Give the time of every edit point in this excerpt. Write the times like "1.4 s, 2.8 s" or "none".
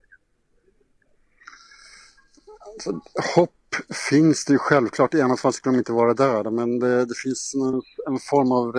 none

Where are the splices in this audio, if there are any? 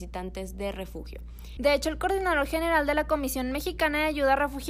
1.6 s

